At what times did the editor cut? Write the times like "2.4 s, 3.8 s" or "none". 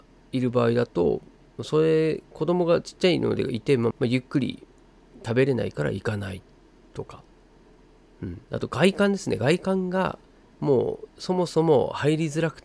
3.9 s